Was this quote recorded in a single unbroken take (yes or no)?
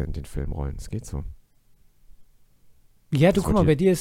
yes